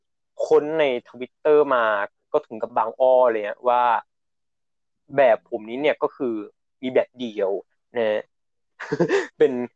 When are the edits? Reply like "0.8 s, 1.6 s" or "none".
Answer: none